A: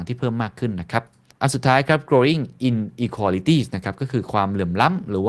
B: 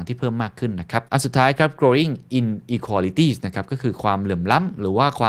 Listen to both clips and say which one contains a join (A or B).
B